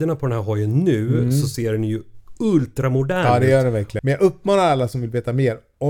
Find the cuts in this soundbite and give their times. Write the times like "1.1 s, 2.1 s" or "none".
4.0 s